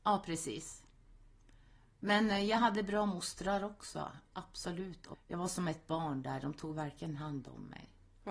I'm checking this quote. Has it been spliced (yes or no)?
yes